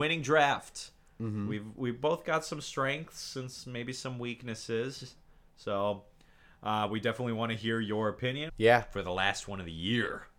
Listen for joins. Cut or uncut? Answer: cut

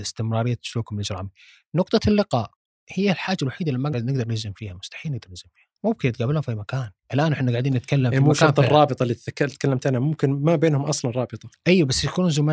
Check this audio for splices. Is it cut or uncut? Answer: cut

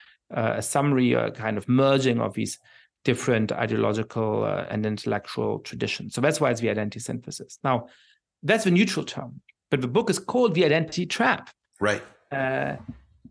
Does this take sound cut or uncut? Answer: uncut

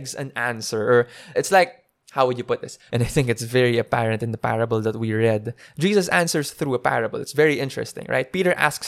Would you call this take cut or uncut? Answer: cut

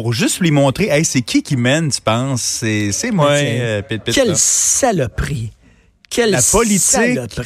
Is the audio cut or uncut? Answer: uncut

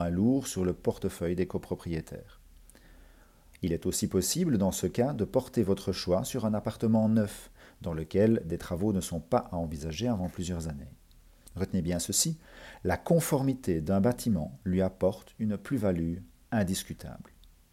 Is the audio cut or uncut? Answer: cut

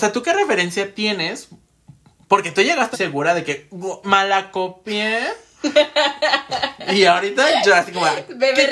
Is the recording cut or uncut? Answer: cut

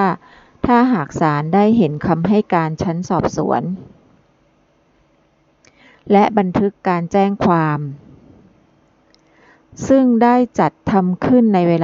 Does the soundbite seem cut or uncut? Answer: uncut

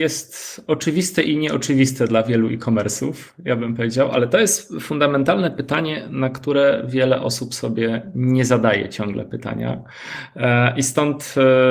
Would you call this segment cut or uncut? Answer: uncut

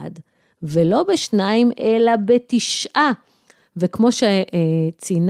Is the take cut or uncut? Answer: uncut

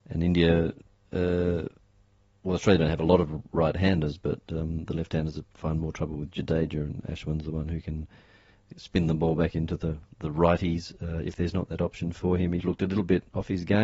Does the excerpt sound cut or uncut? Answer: cut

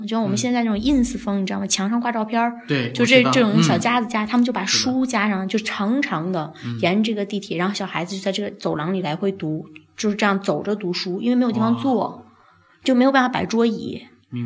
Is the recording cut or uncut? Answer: uncut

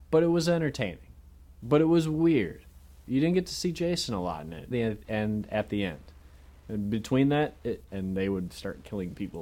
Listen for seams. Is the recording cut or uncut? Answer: cut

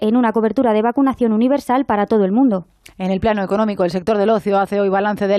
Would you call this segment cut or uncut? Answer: uncut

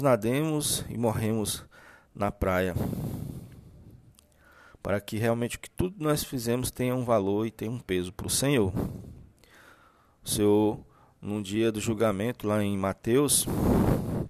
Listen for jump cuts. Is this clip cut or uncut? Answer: uncut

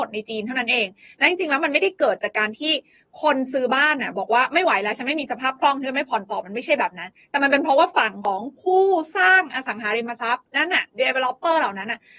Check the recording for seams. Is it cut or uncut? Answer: uncut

